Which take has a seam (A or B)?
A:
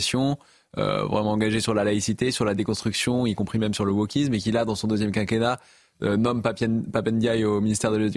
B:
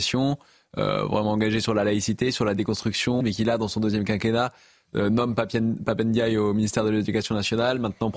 B